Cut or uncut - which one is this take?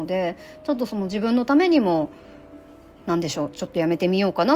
uncut